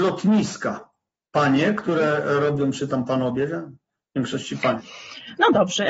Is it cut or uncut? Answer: cut